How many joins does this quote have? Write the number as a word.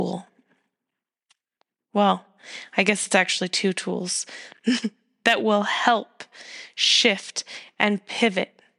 zero